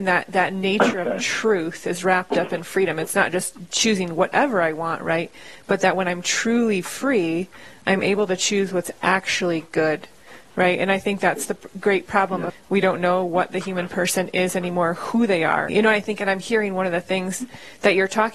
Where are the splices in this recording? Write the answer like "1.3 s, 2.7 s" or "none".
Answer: 12.5 s, 15.7 s